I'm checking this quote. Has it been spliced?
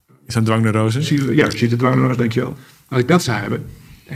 no; 0 cuts

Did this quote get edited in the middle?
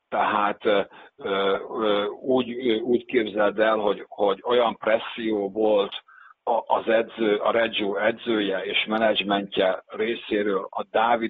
no; 0 cuts

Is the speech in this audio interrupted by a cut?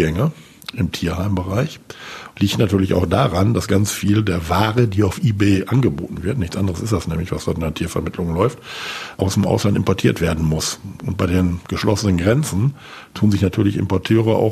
no; 0 cuts

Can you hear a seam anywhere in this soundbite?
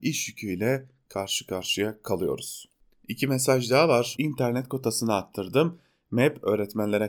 yes; 1 cut; at 4.2 s

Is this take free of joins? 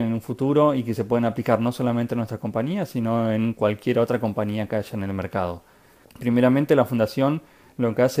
no; 1 cut; at 6.0 s

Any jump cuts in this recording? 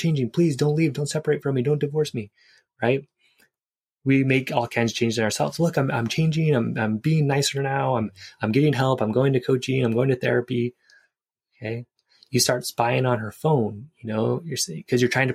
no; 0 cuts

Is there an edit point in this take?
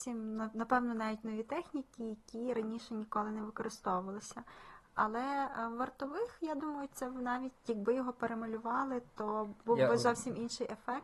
no; 0 cuts

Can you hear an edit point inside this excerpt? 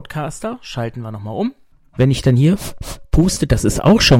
no; 0 cuts

